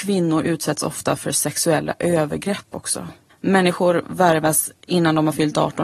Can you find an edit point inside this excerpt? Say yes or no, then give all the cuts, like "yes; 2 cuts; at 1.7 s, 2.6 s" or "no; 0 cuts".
yes; 1 cut; at 3.3 s